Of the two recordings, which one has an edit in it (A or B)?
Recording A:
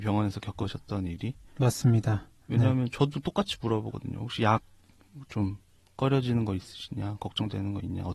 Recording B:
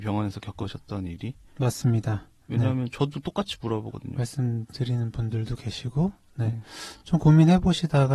B